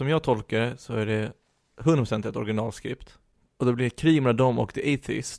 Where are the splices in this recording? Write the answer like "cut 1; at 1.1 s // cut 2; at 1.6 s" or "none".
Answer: cut 1; at 3.5 s